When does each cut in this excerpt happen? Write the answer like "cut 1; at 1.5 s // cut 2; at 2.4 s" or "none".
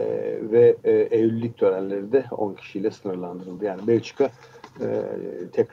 none

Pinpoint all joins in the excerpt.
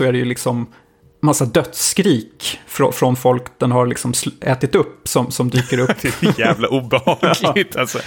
none

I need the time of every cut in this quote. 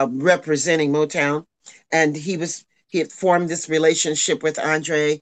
none

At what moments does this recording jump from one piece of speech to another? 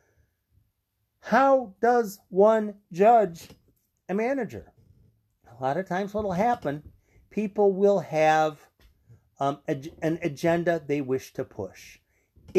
none

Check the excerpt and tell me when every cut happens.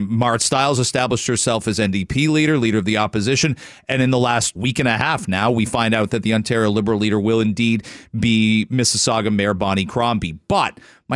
cut 1; at 4.6 s

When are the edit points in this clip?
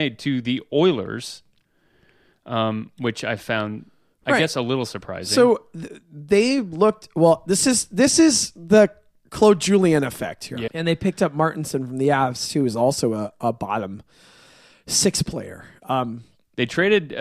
cut 1; at 10.7 s

